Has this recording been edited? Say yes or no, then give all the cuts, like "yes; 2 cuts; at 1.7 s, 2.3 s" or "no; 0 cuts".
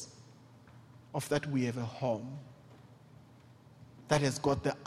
no; 0 cuts